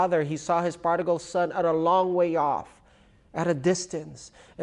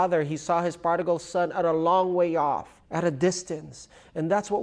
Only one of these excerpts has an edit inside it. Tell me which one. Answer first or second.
second